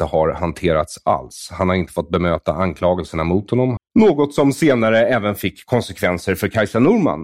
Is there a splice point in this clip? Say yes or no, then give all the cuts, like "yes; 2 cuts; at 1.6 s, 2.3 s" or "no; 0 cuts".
yes; 1 cut; at 3.8 s